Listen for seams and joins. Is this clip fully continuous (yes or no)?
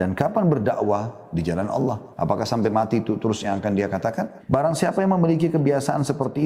no